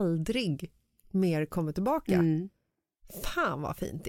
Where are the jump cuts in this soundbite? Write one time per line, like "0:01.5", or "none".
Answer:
none